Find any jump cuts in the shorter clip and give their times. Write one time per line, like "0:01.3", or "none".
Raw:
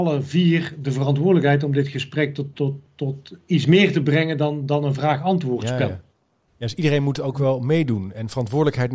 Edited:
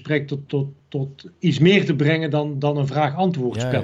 none